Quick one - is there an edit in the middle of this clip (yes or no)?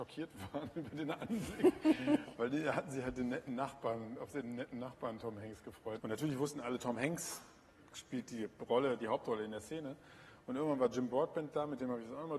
yes